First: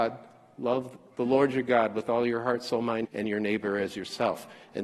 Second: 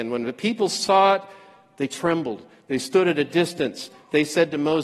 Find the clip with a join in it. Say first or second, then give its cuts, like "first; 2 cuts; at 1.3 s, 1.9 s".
first; 1 cut; at 3.0 s